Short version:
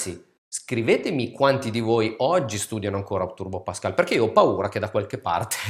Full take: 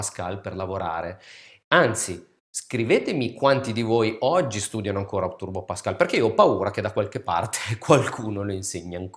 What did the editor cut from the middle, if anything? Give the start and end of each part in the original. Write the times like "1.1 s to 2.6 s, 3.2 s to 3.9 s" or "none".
none